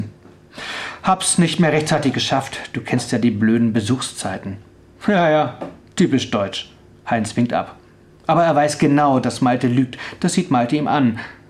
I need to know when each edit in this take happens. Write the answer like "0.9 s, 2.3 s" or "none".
none